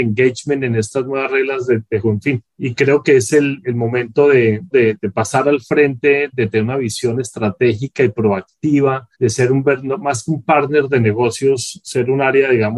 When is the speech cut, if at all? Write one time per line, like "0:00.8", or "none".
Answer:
0:02.0
0:04.7
0:09.1